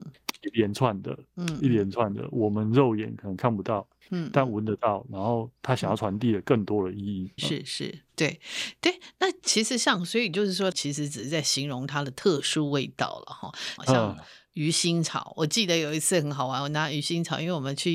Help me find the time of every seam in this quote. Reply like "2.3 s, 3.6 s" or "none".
7.4 s, 10.7 s, 13.8 s